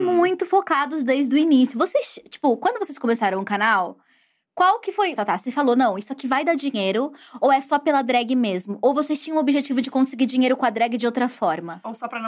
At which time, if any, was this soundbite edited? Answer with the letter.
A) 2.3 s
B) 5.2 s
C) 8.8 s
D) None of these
B